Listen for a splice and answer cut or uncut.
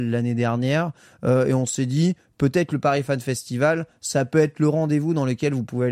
uncut